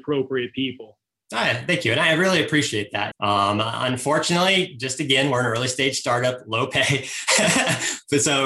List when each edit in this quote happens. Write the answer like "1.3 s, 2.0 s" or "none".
3.1 s